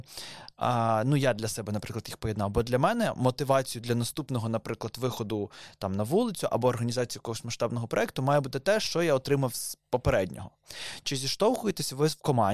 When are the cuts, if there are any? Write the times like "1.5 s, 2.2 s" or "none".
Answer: none

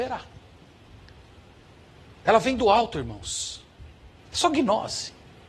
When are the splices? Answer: 4.2 s

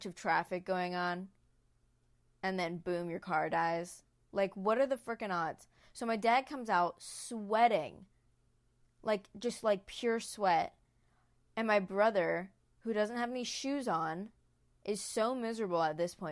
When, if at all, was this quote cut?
none

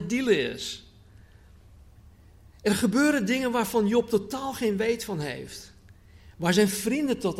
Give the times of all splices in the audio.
none

